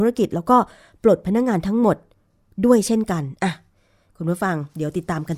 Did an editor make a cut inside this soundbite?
no; 0 cuts

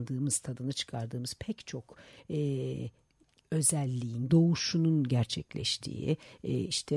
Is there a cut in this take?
yes; 1 cut; at 4.3 s

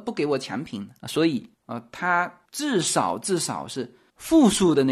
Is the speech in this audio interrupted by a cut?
yes; 1 cut; at 1.5 s

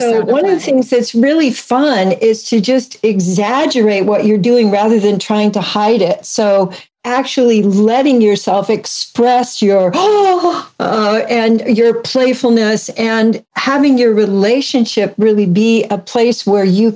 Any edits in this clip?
no; 0 cuts

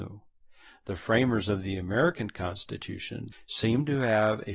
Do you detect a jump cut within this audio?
yes; 1 cut; at 3.3 s

